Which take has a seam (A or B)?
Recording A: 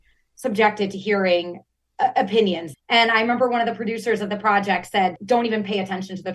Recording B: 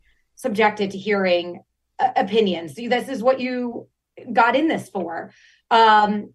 A